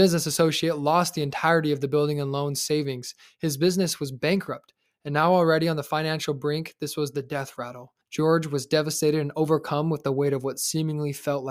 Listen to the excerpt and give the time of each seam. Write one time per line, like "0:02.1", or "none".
0:08.0

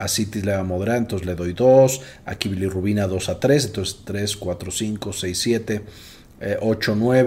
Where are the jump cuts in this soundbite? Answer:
none

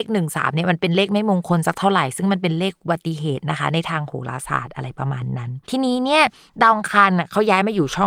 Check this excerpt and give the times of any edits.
0:05.6

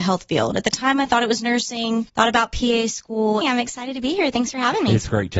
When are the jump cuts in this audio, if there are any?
0:02.1
0:03.4

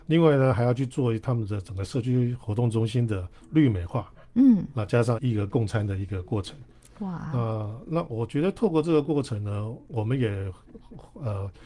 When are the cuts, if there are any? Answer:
0:05.2

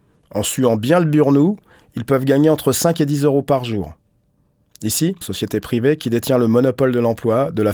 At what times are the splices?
0:05.2

